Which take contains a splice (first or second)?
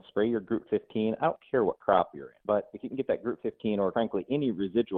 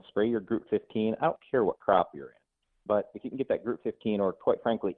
first